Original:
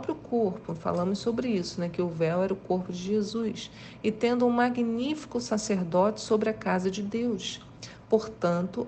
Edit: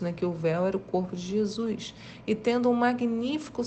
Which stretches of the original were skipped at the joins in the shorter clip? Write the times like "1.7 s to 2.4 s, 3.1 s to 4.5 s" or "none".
none